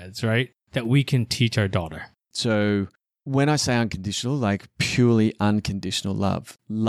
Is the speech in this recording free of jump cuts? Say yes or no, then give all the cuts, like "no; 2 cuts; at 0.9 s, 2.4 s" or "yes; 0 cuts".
no; 1 cut; at 2.2 s